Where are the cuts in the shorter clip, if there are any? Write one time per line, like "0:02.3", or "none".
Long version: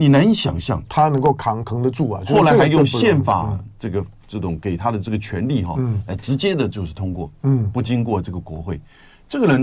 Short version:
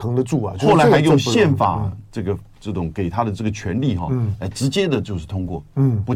none

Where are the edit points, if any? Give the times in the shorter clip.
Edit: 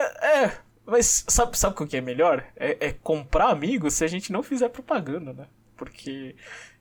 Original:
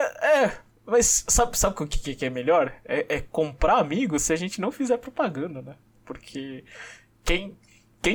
0:01.9

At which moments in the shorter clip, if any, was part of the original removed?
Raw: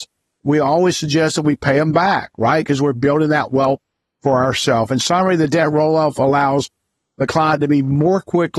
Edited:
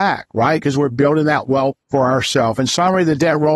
0:01.8

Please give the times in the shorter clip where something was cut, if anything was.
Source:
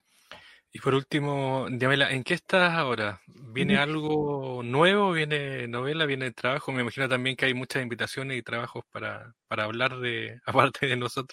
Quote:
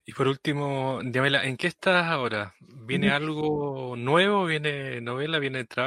none

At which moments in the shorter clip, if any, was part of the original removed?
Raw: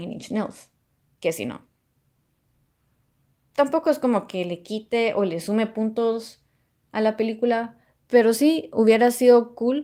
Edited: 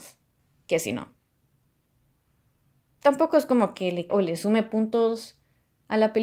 0:04.1

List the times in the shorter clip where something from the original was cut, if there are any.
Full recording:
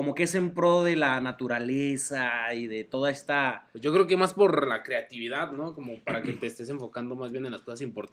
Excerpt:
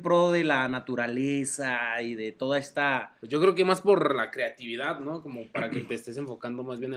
none

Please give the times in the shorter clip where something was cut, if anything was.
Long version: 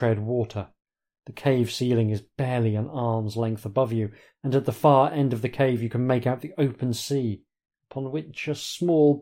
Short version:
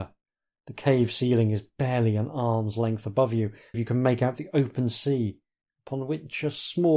0:03.7

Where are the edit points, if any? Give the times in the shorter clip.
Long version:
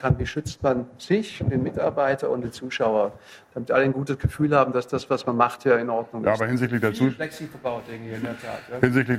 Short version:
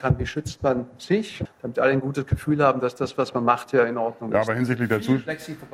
0:01.4

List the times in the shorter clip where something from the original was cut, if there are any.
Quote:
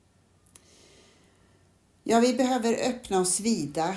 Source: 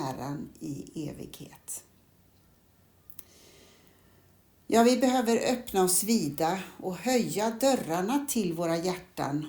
none

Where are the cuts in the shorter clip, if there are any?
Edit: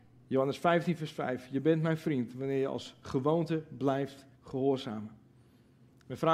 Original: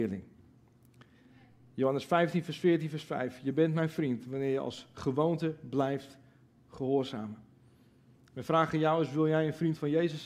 0:01.0
0:04.3

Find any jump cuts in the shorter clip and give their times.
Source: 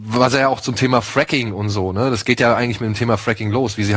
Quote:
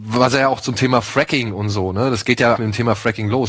0:02.6

